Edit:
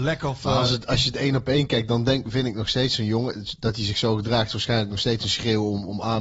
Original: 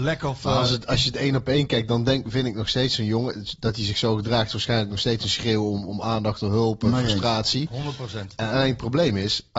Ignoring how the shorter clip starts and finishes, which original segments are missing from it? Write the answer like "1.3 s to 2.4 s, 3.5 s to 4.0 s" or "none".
none